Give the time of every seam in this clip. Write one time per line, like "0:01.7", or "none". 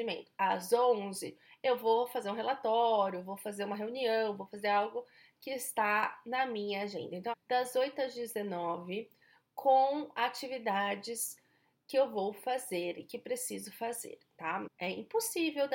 0:07.3
0:14.7